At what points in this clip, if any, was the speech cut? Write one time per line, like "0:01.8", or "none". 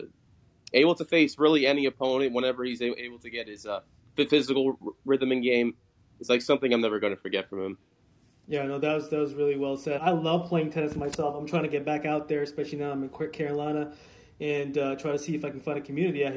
0:10.0